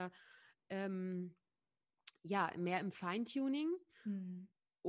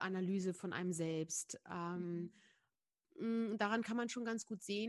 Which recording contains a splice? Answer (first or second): second